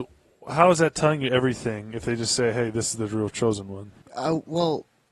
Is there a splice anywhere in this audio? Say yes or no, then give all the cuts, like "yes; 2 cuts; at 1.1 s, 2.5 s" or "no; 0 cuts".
yes; 1 cut; at 4.0 s